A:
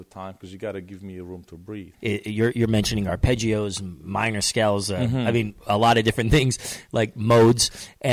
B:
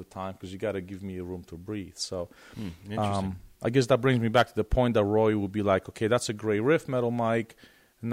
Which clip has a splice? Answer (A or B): A